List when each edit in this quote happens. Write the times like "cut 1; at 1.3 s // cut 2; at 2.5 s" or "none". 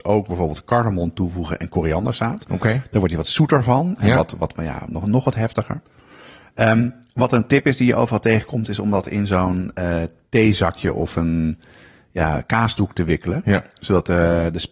none

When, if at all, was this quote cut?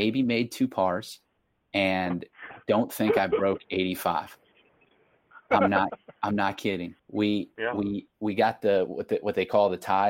cut 1; at 7.0 s

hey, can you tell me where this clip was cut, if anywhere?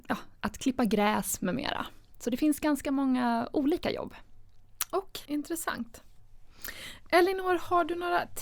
cut 1; at 5.3 s

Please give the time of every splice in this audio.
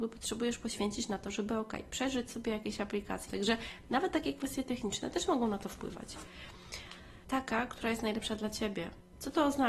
cut 1; at 3.3 s // cut 2; at 7.2 s

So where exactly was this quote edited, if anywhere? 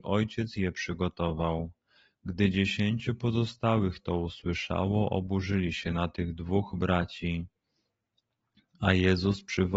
none

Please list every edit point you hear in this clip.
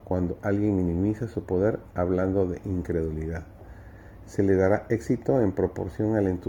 cut 1; at 4.2 s

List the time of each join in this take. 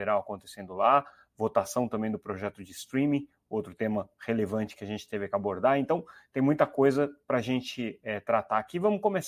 none

